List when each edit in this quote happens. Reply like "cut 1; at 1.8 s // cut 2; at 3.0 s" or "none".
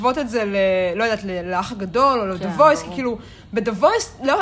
none